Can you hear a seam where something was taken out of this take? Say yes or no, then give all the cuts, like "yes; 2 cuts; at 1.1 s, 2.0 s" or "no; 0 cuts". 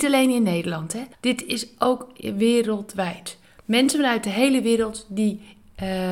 yes; 1 cut; at 1.1 s